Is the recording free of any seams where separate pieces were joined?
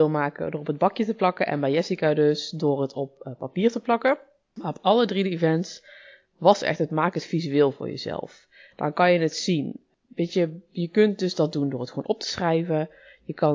yes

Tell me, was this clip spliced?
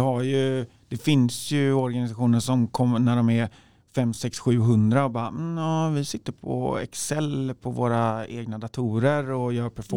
no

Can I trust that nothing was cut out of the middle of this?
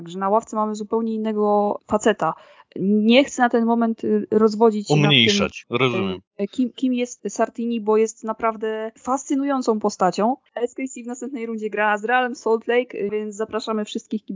no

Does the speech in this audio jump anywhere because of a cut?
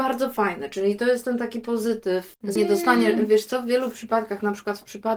yes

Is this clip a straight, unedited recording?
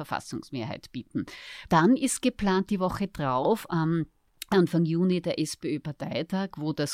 no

